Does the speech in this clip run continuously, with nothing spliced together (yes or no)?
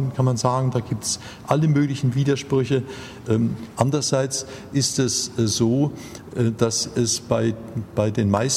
no